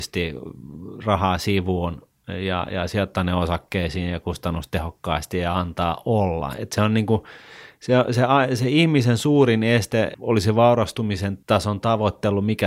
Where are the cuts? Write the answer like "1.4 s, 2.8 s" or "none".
none